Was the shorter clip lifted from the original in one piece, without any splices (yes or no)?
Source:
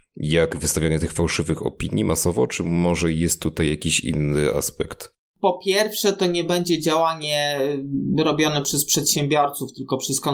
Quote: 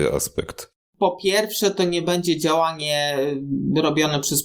yes